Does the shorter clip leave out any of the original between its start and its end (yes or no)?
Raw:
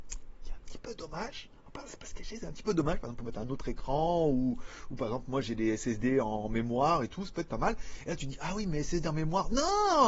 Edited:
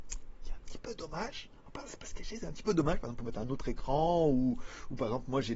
no